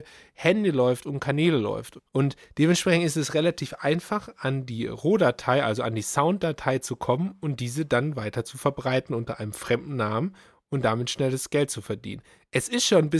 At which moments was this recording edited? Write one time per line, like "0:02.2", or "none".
0:02.1